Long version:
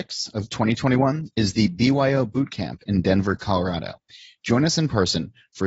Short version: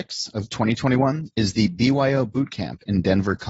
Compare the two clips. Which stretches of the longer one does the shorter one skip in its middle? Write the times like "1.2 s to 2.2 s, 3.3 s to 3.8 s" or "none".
none